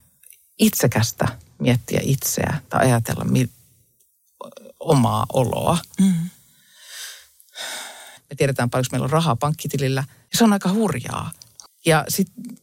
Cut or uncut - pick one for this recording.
cut